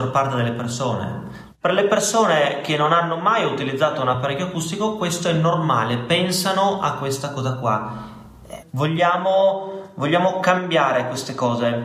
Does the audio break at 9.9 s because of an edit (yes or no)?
no